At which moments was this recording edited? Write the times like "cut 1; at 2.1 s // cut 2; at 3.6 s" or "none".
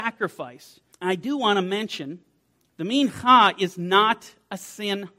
cut 1; at 0.9 s // cut 2; at 2.7 s